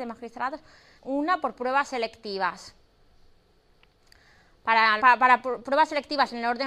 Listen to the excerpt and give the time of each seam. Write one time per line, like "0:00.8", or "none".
0:01.0
0:05.0